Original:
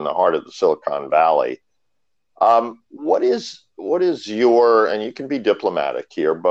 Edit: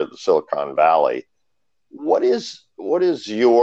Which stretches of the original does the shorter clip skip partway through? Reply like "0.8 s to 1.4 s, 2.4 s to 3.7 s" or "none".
2.2 s to 2.9 s